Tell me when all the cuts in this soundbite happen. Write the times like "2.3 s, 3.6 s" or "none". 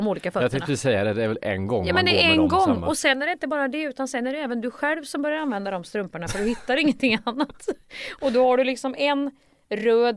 none